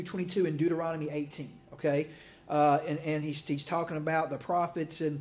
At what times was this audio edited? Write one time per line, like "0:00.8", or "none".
none